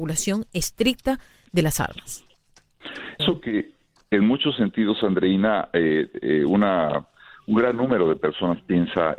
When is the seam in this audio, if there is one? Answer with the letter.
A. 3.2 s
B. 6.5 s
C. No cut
A